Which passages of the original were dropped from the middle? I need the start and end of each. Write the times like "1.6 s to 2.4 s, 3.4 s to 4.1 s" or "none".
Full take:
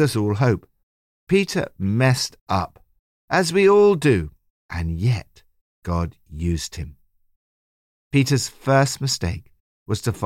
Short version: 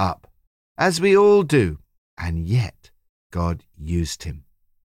none